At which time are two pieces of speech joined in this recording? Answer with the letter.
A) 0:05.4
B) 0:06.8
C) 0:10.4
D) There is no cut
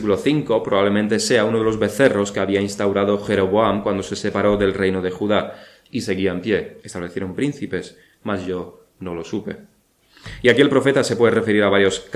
B